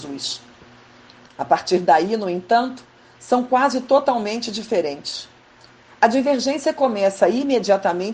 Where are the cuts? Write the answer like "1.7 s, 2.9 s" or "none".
1.3 s